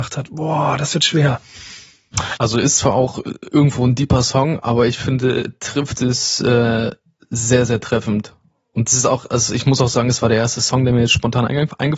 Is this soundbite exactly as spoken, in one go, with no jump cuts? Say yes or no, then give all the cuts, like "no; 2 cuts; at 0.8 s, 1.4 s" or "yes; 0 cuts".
no; 1 cut; at 2.4 s